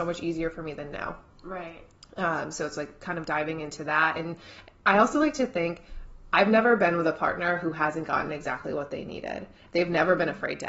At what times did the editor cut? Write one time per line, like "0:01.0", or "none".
none